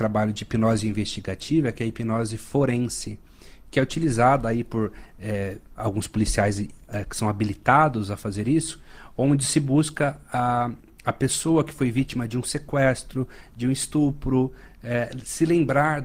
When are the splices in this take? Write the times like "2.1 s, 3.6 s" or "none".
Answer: none